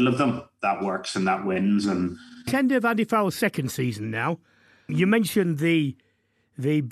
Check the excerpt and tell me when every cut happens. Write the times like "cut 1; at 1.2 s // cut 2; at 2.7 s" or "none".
none